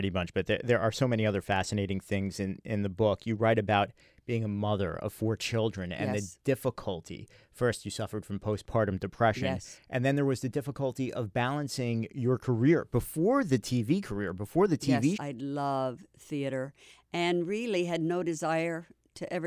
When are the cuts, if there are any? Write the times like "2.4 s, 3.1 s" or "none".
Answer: 15.2 s